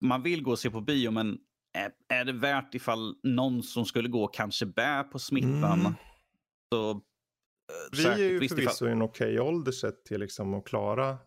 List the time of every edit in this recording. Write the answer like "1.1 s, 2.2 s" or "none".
7.9 s